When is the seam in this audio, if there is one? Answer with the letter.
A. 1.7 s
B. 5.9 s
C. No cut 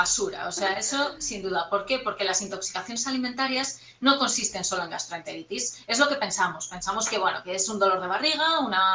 C